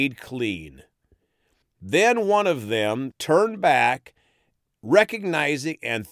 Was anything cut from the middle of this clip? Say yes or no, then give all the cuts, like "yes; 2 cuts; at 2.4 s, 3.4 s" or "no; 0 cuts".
yes; 2 cuts; at 1.6 s, 3.1 s